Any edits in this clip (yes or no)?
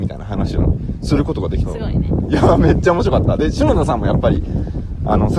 yes